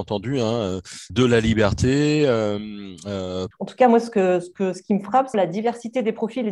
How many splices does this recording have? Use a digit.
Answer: 3